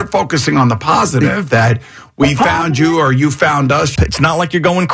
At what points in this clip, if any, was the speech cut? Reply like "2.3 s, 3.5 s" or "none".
4.0 s